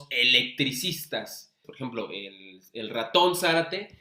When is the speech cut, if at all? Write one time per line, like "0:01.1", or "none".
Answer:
0:01.6